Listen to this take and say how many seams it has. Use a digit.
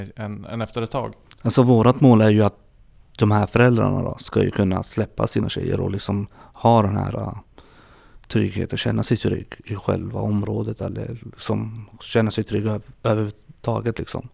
1